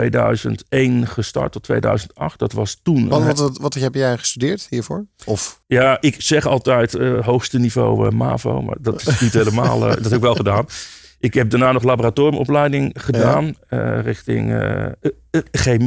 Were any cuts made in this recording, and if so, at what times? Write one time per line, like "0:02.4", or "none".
none